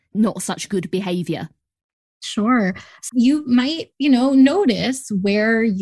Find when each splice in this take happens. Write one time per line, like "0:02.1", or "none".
0:03.1